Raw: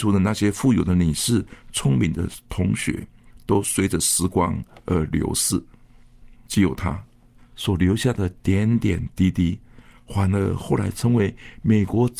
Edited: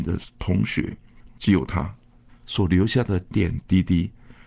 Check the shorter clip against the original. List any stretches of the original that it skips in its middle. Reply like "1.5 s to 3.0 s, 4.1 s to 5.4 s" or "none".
3.4 s to 6.4 s, 8.4 s to 8.8 s

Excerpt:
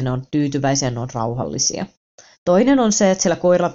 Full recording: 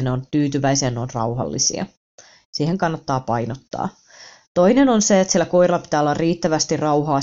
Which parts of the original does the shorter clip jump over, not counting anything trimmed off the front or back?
2.3 s to 4.4 s

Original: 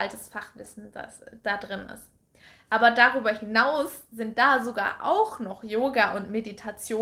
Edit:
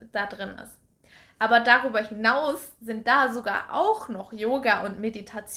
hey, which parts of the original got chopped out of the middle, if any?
none

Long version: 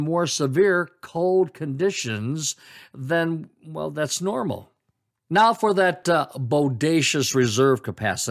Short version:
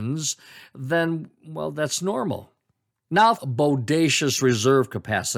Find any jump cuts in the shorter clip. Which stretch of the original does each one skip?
5.6 s to 6.3 s

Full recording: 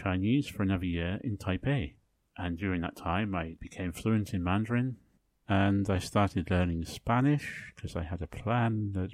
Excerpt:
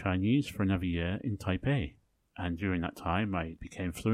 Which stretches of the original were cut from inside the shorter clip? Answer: none

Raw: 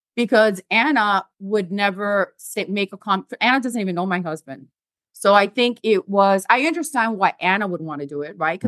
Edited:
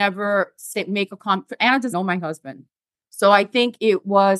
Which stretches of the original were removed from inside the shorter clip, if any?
3.7 s to 3.9 s

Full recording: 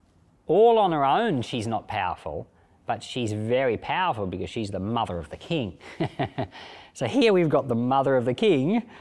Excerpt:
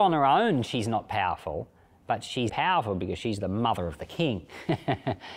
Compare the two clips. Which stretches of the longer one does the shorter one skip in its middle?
3.3 s to 3.8 s

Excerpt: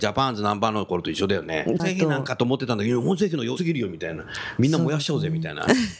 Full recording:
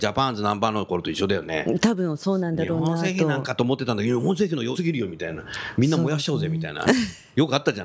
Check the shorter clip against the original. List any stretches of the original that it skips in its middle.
1.8 s to 3.0 s

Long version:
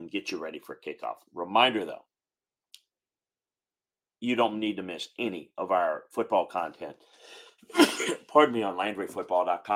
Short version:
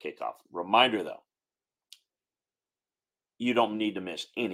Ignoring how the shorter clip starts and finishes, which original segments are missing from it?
none

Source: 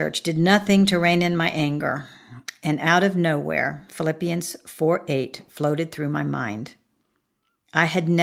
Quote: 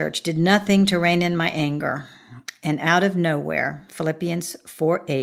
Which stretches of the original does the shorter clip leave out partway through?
none

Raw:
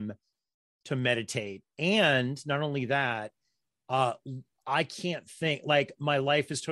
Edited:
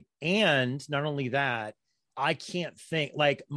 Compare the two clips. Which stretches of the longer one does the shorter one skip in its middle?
3.7 s to 4.6 s

